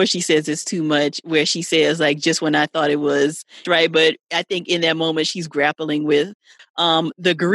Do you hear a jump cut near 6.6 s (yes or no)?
yes